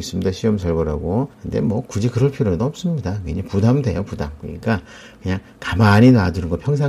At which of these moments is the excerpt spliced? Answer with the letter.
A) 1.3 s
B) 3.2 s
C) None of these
A